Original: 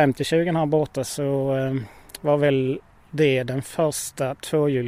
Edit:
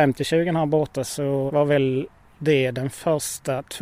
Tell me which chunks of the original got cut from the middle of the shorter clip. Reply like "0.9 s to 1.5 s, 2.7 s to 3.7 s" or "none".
1.5 s to 2.2 s

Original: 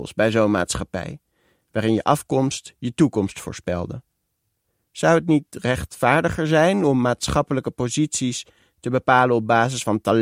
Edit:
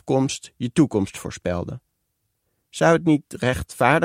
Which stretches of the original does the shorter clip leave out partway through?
none

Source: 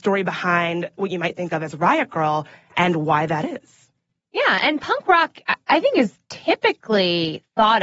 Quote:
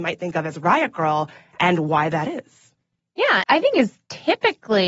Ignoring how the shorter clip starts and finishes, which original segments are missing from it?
4.6 s to 5.6 s

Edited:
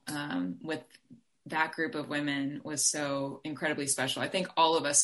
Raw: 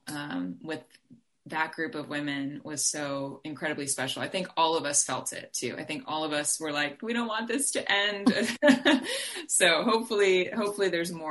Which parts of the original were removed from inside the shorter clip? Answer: none

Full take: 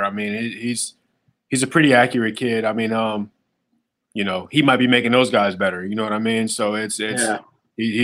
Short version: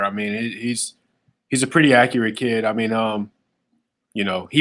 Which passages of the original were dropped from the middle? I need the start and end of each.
none

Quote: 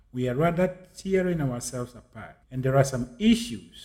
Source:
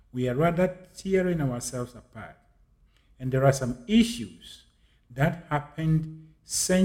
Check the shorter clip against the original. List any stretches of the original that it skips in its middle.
2.4 s to 3.1 s

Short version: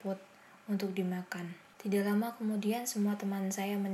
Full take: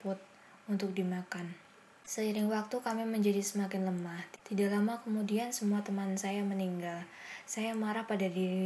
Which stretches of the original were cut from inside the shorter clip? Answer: 1.7 s to 4.4 s

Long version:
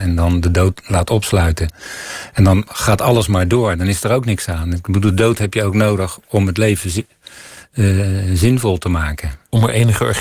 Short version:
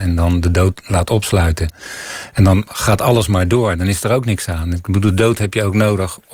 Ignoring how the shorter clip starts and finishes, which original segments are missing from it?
none

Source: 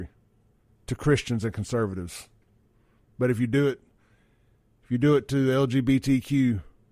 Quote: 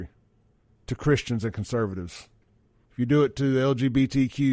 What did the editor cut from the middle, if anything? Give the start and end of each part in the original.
2.8 s to 4.8 s

